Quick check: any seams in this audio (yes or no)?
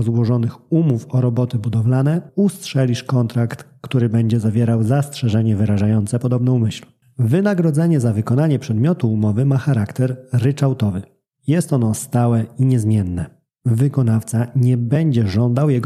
yes